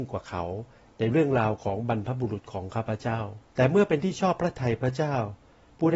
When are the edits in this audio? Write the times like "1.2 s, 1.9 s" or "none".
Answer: 3.5 s